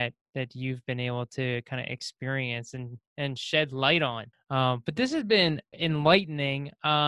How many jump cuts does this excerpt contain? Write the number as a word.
two